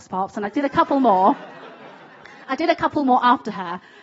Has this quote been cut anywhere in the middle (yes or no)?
no